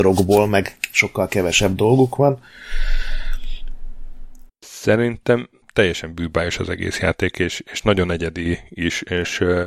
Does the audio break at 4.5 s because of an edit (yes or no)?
yes